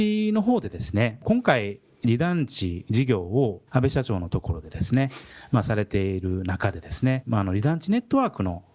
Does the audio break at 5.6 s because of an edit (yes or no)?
no